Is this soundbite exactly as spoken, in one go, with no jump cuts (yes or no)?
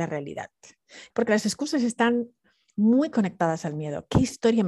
no